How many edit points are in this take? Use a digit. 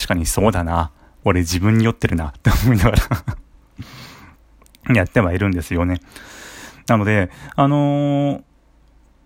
0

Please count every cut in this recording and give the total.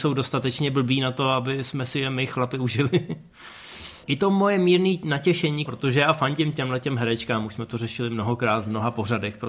2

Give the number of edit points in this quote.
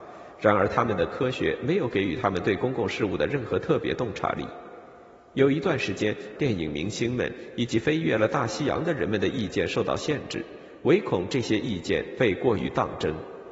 1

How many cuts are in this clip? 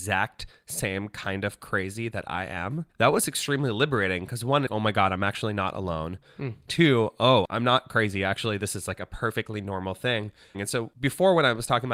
2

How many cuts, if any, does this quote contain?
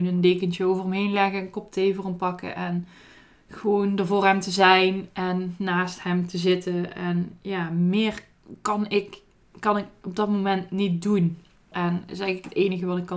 1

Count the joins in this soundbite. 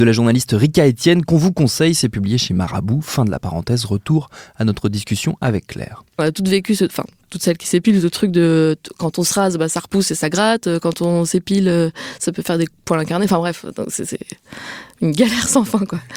0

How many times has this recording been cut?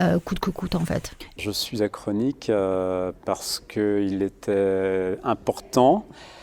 1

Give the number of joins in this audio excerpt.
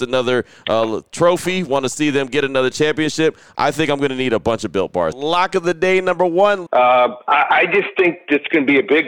2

